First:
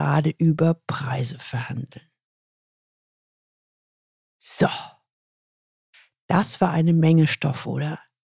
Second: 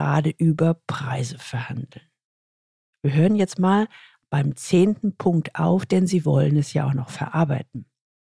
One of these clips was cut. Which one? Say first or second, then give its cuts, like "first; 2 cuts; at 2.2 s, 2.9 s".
second; 1 cut; at 2.9 s